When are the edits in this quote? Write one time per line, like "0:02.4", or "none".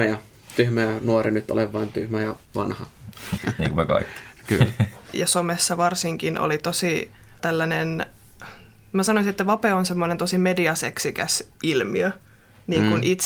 0:03.4
0:05.1
0:07.4